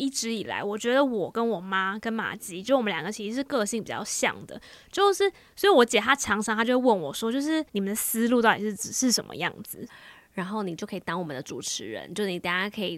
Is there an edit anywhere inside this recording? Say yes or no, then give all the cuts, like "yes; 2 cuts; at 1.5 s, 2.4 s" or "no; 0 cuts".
yes; 2 cuts; at 7.7 s, 9.9 s